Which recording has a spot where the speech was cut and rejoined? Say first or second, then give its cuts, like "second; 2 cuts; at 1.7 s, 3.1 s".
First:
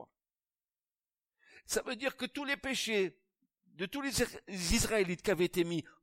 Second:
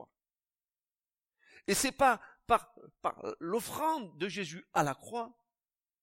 first; 1 cut; at 1.6 s